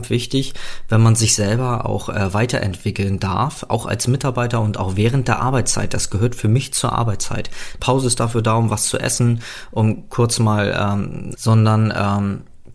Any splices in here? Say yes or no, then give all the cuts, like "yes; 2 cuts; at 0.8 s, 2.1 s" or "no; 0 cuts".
yes; 2 cuts; at 7.8 s, 11.4 s